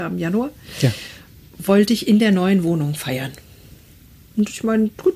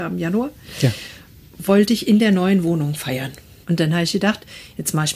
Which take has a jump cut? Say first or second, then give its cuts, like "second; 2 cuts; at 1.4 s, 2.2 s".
second; 1 cut; at 3.6 s